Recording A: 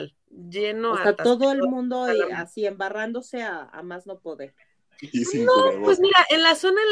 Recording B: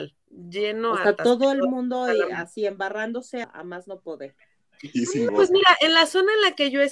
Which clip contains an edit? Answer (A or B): B